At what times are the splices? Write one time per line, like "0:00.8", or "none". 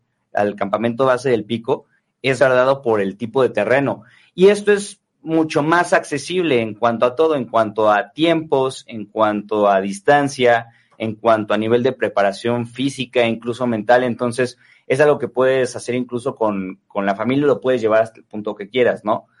0:02.4